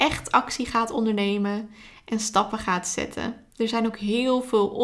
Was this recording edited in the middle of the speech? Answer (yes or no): yes